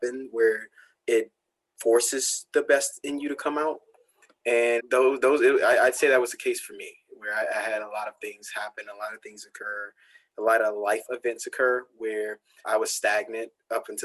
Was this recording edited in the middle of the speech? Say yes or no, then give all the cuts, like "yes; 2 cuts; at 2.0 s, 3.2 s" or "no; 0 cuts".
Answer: yes; 2 cuts; at 4.8 s, 12.6 s